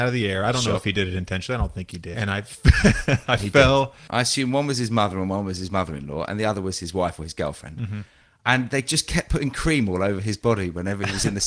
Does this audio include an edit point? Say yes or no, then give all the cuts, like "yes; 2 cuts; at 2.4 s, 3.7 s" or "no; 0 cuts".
yes; 2 cuts; at 2.1 s, 4.1 s